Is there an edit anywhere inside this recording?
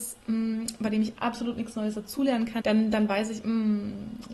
yes; 1 cut; at 2.6 s

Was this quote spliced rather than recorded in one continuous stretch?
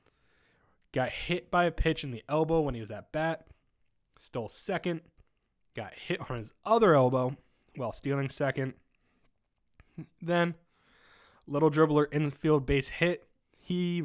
no; 0 cuts

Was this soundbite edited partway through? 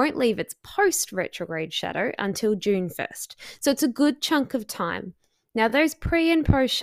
no; 0 cuts

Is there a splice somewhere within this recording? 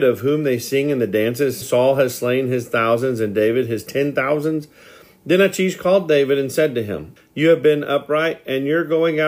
yes; 2 cuts; at 1.6 s, 7.2 s

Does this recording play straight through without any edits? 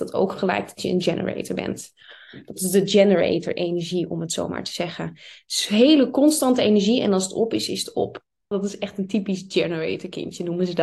no; 1 cut; at 8.5 s

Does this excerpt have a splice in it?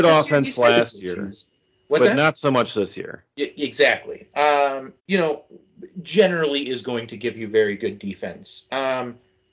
yes; 1 cut; at 5.0 s

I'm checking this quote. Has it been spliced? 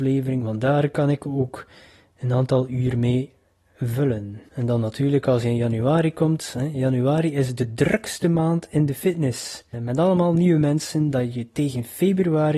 no; 0 cuts

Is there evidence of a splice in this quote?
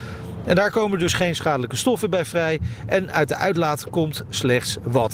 no; 0 cuts

